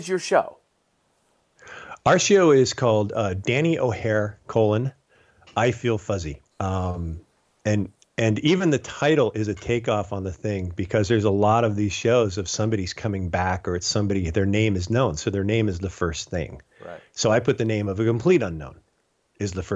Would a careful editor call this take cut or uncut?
cut